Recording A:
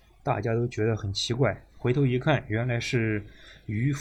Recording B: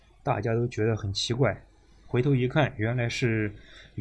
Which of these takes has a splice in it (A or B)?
A